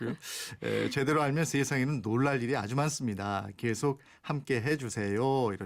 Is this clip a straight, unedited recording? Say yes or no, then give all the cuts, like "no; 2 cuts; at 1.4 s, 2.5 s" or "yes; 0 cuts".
yes; 0 cuts